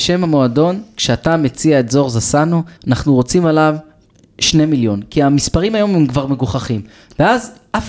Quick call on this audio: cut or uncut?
cut